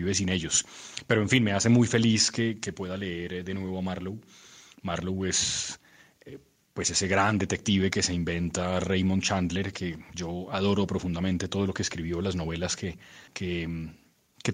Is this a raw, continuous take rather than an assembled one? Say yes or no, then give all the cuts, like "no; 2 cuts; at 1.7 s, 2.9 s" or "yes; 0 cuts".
no; 1 cut; at 13.3 s